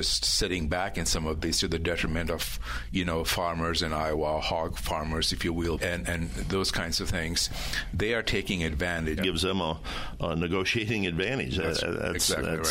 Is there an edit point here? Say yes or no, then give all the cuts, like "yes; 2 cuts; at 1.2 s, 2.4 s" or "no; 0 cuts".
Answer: yes; 2 cuts; at 5.8 s, 9.2 s